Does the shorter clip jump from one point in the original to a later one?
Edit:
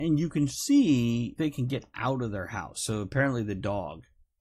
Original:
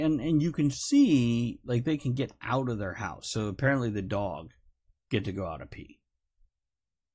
yes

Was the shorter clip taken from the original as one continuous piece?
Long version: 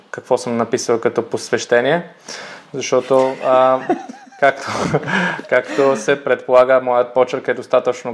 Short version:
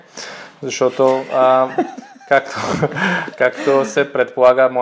yes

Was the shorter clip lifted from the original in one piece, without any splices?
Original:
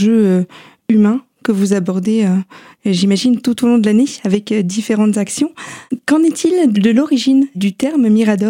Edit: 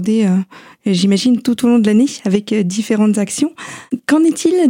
yes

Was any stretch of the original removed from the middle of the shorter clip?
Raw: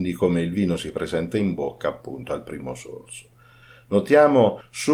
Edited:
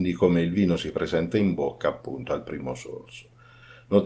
no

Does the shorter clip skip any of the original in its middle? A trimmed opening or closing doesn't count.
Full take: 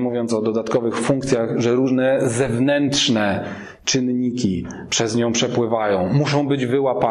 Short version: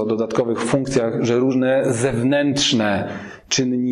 no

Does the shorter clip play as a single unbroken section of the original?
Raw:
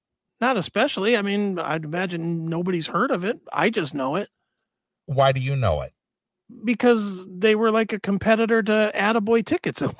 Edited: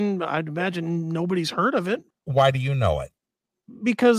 no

